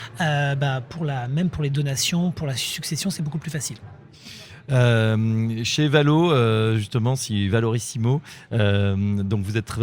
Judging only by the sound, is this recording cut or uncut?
uncut